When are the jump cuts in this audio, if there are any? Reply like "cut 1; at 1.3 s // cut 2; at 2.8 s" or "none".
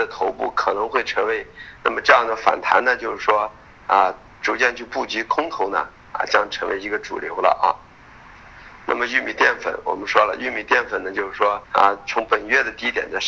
cut 1; at 1.8 s // cut 2; at 11.6 s